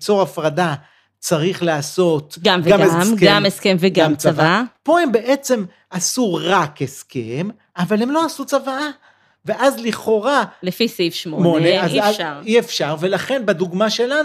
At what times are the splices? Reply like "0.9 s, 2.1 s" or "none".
none